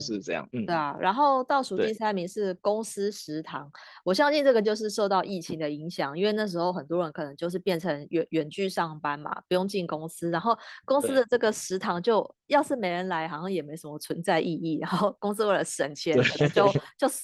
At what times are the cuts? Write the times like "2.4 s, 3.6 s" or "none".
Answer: none